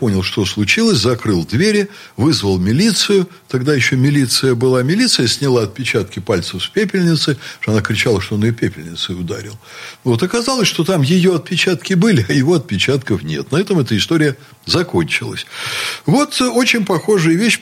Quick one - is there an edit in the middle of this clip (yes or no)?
no